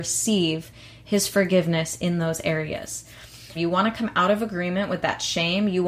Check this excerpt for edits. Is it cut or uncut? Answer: cut